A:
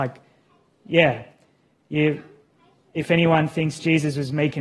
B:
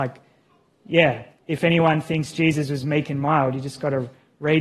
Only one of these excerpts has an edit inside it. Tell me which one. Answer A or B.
B